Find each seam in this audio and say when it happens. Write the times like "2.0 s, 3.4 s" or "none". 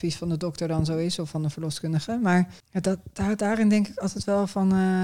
2.6 s